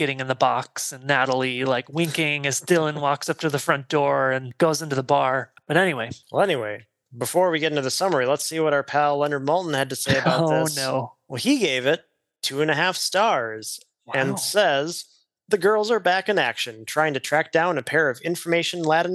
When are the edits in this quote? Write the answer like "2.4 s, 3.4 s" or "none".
none